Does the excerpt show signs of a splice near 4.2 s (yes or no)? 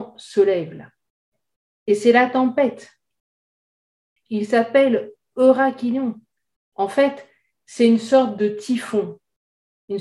yes